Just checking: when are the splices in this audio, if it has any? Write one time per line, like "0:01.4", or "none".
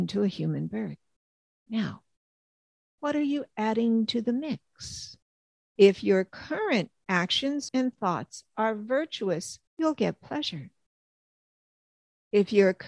0:05.6
0:07.7
0:09.7

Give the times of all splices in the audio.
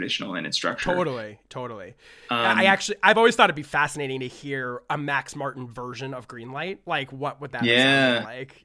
none

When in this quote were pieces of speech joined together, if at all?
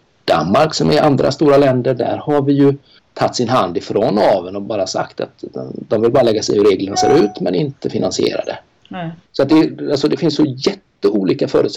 0:03.0
0:09.3

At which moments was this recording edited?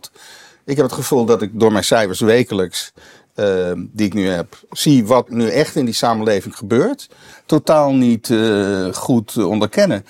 0:05.3
0:07.3

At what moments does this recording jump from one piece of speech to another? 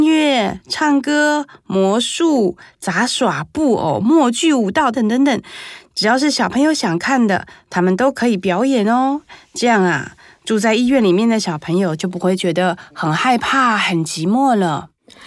0:04.9

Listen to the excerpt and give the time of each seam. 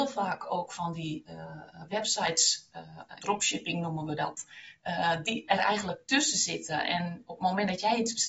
0:03.2

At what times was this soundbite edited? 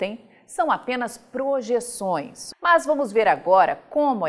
0:02.5

